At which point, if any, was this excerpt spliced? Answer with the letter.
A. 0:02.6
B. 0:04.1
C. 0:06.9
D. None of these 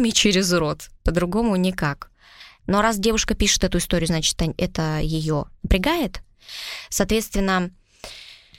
A